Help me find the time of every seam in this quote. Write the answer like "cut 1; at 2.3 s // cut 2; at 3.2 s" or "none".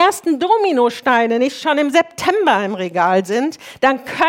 none